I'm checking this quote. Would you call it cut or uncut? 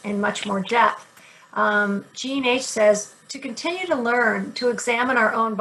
uncut